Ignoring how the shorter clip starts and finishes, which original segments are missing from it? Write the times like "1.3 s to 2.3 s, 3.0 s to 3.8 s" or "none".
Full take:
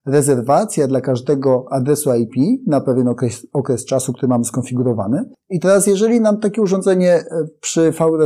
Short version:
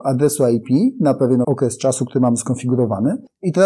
3.1 s to 3.5 s